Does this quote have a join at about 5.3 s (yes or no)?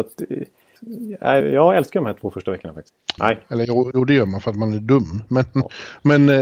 no